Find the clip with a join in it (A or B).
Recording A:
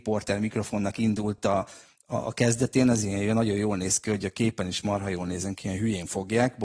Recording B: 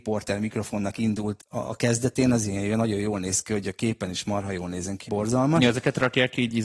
B